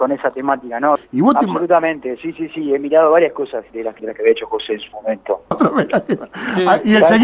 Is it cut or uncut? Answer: cut